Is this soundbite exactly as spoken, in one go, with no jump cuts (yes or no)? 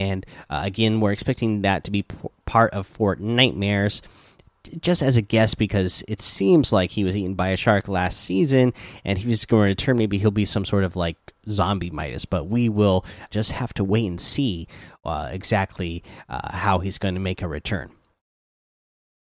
no